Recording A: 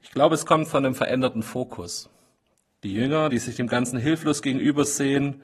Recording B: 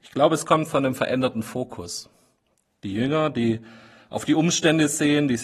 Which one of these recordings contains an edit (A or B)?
A